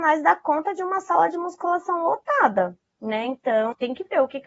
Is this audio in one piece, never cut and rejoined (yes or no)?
yes